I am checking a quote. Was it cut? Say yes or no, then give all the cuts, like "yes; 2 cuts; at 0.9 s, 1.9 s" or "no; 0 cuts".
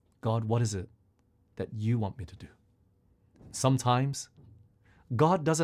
no; 0 cuts